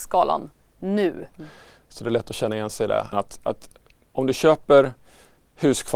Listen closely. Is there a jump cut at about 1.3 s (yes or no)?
yes